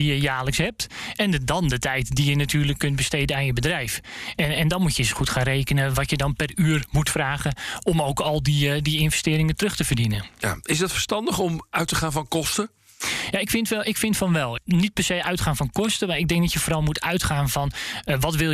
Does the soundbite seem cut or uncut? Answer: uncut